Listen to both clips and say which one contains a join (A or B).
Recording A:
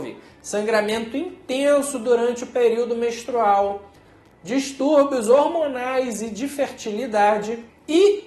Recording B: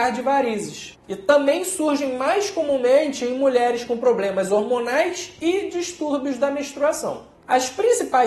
B